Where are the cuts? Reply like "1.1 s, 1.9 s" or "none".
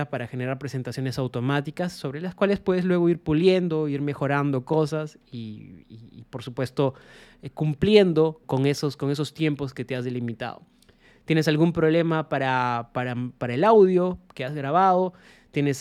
8.4 s